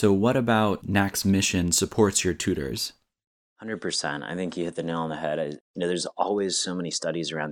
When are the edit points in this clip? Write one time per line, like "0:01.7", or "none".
none